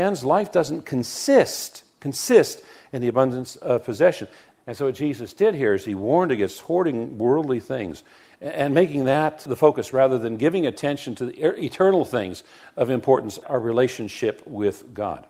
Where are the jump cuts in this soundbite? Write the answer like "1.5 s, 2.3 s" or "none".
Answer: 4.5 s, 9.5 s, 13.4 s